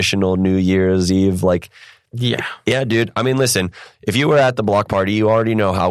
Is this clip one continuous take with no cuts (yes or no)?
yes